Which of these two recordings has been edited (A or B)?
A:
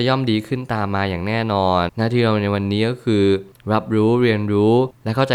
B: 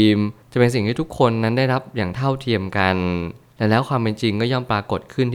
A